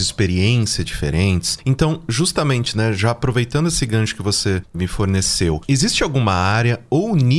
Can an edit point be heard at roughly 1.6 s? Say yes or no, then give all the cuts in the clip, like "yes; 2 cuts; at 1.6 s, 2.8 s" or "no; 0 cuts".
no; 0 cuts